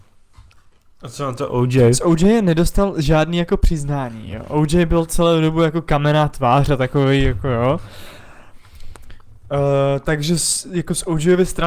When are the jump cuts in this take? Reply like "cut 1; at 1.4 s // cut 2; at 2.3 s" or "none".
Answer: none